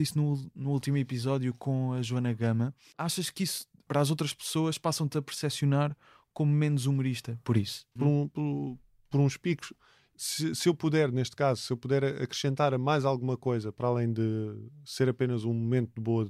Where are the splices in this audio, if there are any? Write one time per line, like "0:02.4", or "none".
0:08.0